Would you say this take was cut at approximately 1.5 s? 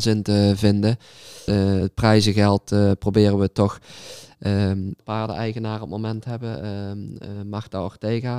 yes; 2 cuts; at 1.5 s, 5.0 s

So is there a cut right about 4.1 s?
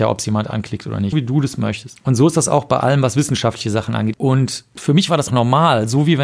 yes; 3 cuts; at 1.1 s, 4.1 s, 5.3 s

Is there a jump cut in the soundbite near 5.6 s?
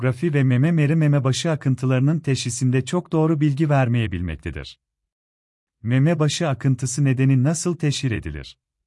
yes; 1 cut; at 5.6 s

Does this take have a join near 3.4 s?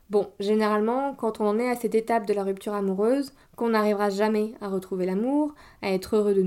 yes; 1 cut; at 3.4 s

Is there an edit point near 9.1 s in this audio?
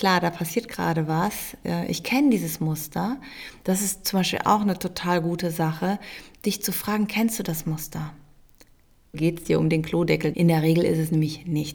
yes; 2 cuts; at 9.1 s, 10.3 s

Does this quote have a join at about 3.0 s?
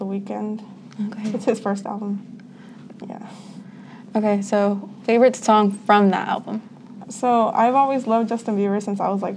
yes; 2 cuts; at 3.0 s, 7.0 s

